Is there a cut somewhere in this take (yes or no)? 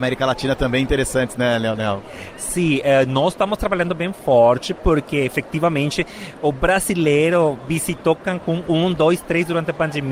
no